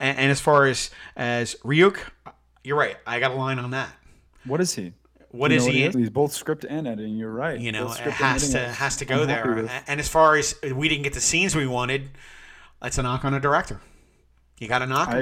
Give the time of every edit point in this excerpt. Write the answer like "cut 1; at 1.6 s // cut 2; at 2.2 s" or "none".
cut 1; at 5.9 s